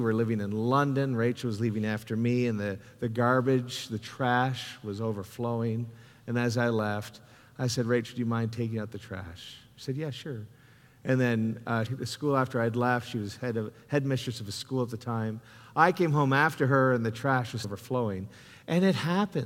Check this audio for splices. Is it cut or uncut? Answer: cut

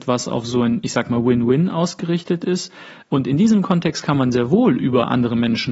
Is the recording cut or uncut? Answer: cut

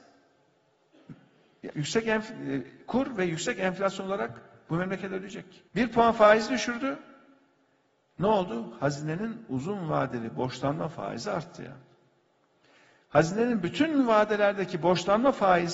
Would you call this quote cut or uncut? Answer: cut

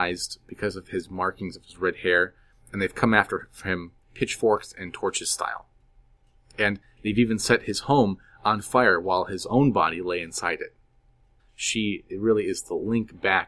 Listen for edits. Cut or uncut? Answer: cut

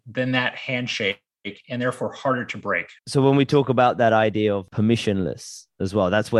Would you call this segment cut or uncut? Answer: cut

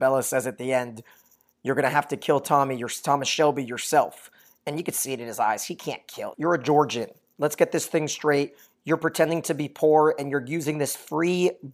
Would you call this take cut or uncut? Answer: cut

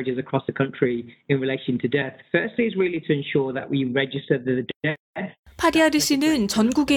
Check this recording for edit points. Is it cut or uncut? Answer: uncut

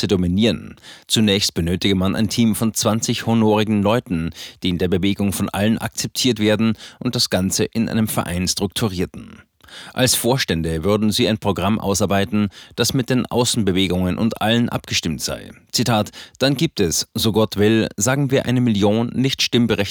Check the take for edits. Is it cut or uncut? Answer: uncut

